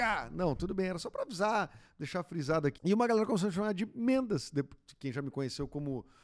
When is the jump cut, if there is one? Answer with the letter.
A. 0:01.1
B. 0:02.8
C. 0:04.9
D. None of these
B